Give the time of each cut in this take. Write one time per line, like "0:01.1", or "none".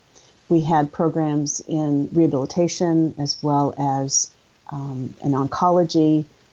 none